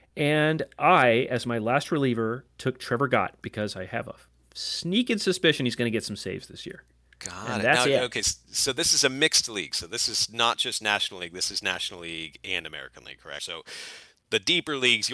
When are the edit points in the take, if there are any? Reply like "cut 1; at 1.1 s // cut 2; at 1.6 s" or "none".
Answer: cut 1; at 13.4 s